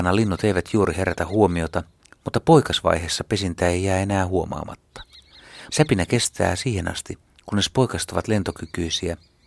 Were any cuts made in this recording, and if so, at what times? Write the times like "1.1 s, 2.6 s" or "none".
5.7 s